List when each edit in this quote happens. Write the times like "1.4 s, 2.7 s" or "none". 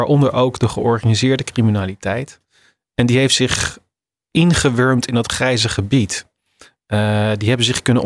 none

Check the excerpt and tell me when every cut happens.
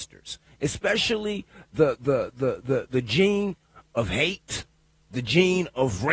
none

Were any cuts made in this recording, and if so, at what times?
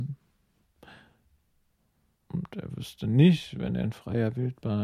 none

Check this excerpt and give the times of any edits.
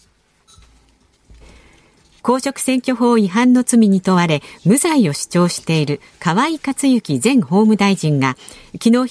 2.2 s

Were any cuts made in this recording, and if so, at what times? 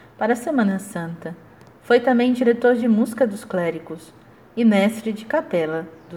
none

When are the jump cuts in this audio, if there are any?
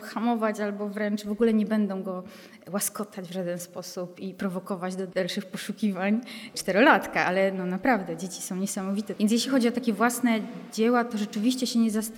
none

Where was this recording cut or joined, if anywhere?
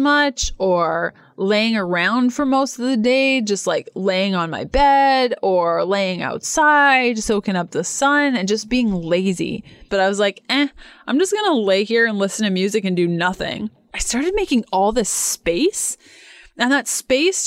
9.9 s

